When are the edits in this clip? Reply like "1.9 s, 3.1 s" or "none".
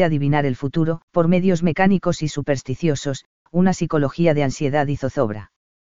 1.1 s, 3.4 s